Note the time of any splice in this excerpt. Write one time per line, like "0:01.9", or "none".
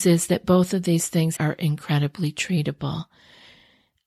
0:01.4